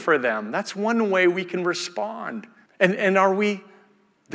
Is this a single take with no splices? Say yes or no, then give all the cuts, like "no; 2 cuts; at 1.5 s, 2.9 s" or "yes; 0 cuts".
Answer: no; 1 cut; at 2.7 s